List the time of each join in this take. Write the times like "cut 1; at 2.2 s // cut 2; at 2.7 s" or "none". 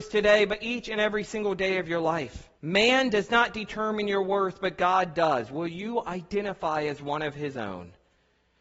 cut 1; at 2.5 s